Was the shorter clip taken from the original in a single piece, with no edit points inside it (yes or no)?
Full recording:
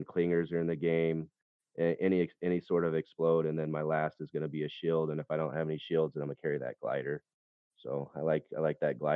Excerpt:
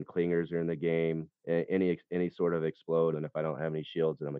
no